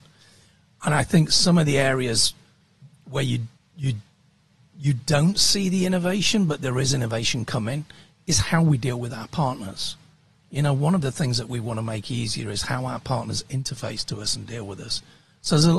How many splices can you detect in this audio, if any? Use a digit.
0